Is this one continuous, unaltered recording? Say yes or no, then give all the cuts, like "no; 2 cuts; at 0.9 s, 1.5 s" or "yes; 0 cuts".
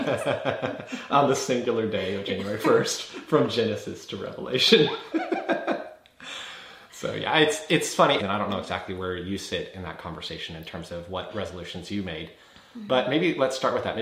no; 1 cut; at 8.2 s